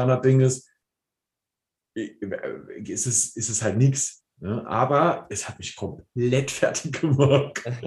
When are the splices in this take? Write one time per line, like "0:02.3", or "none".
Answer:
none